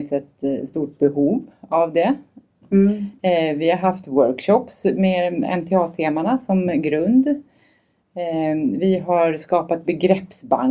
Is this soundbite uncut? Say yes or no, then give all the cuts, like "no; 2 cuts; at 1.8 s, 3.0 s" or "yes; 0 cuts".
no; 1 cut; at 2.6 s